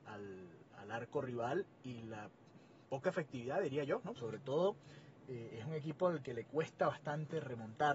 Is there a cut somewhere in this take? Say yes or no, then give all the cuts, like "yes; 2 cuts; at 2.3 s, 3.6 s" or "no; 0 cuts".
yes; 1 cut; at 4.2 s